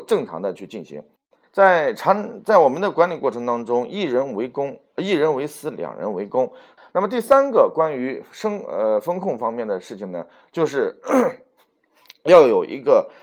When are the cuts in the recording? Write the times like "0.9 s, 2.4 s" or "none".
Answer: 1.4 s, 6.8 s